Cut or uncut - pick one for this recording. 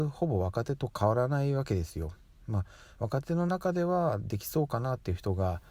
uncut